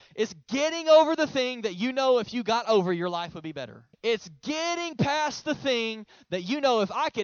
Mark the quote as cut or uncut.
cut